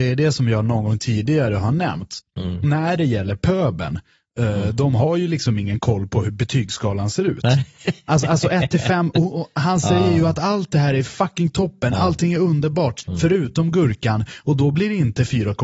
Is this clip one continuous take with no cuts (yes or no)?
no